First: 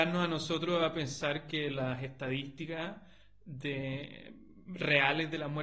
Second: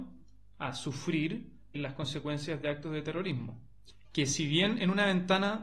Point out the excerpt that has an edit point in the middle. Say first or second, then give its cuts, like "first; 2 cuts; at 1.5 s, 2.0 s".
second; 2 cuts; at 1.7 s, 4.0 s